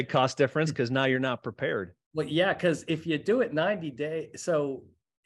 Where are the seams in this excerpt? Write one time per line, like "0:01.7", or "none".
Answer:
0:02.0